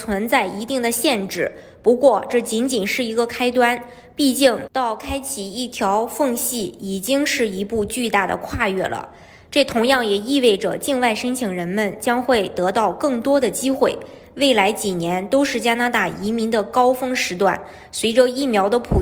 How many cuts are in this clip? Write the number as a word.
one